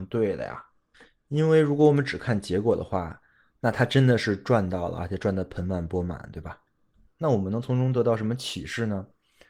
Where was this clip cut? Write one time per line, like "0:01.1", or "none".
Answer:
0:07.1